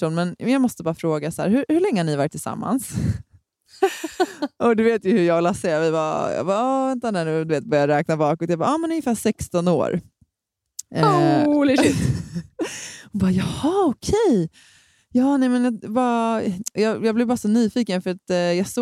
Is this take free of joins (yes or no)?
yes